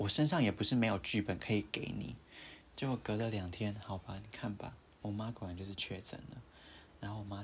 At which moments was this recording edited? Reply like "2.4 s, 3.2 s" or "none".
2.7 s

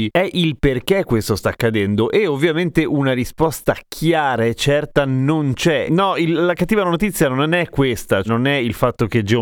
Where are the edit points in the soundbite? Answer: 5.9 s, 8.2 s

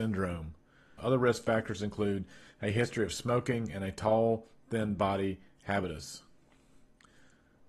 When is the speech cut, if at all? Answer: 1.0 s

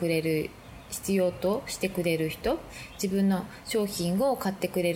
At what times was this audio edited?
none

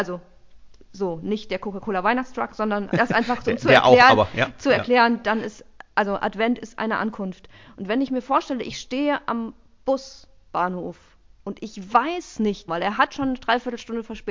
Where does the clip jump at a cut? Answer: 2.9 s, 12.7 s

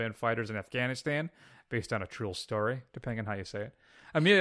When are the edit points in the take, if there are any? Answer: 2.9 s

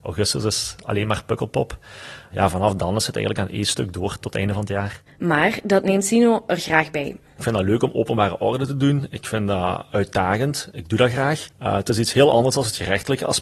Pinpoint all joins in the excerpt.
5.1 s

